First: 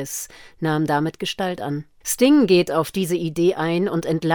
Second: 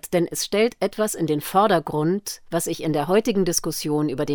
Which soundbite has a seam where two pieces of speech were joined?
first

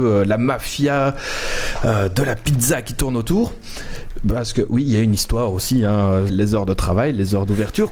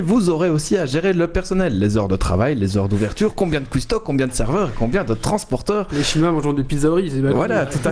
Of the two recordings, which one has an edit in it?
first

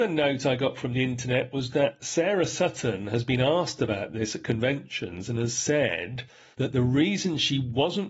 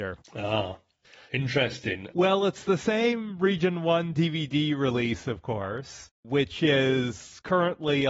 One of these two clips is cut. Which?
second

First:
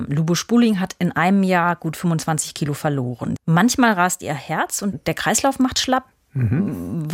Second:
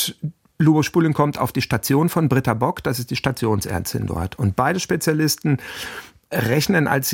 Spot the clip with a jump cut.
first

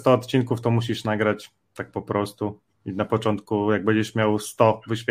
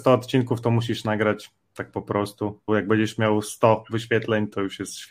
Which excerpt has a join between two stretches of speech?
second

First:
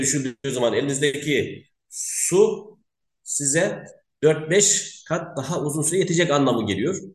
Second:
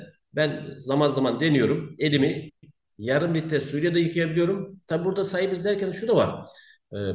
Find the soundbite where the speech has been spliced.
second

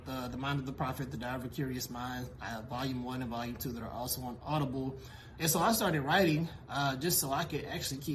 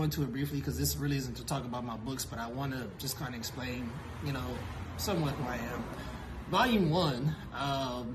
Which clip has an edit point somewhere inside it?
first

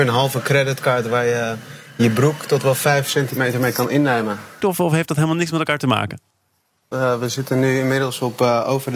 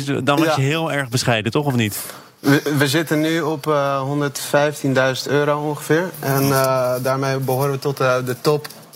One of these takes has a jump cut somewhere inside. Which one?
first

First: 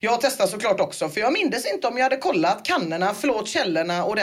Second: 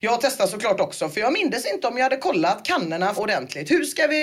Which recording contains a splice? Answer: second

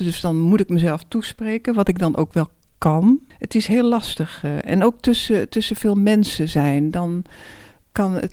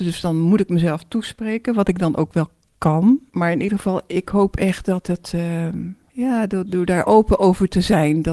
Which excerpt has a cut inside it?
first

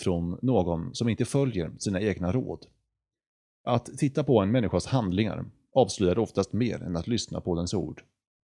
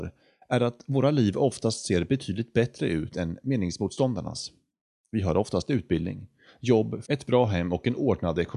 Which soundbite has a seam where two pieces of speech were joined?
second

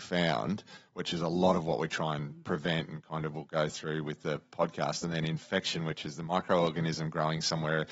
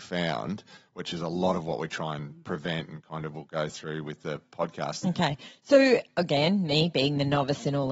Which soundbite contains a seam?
second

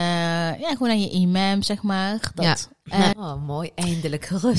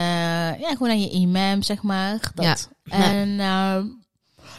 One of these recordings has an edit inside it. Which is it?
first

